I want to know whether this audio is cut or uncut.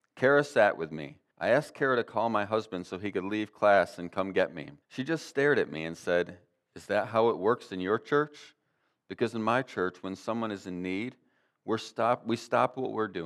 cut